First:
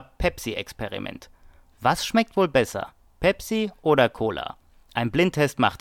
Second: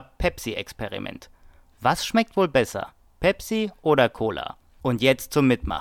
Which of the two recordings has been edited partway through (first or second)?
second